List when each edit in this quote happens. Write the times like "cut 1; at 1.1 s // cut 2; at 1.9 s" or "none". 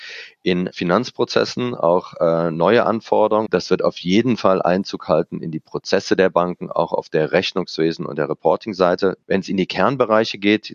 cut 1; at 3.5 s // cut 2; at 9.2 s